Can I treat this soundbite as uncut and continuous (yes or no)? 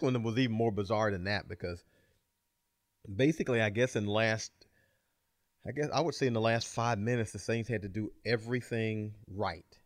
yes